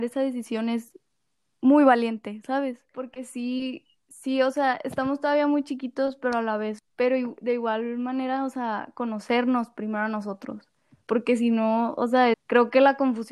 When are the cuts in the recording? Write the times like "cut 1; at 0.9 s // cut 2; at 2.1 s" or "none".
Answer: cut 1; at 2.9 s // cut 2; at 6.8 s // cut 3; at 12.3 s